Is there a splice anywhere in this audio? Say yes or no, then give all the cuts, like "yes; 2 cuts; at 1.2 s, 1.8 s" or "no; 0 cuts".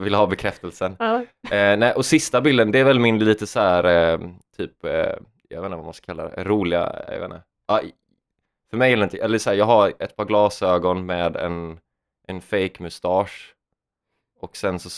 no; 0 cuts